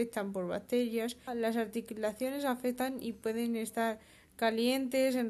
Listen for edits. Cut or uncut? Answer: cut